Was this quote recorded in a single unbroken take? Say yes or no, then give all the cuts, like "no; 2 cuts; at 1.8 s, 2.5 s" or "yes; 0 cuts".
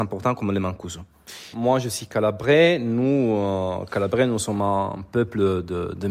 no; 1 cut; at 1.5 s